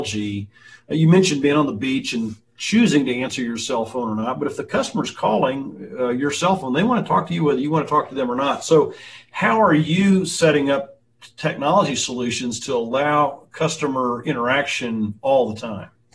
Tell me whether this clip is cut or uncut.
uncut